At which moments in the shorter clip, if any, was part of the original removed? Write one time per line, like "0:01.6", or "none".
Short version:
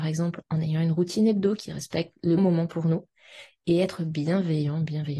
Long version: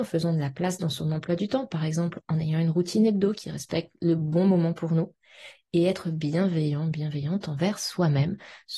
0:02.4